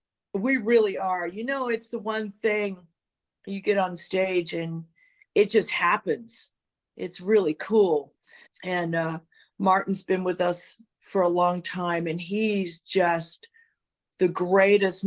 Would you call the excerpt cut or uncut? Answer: cut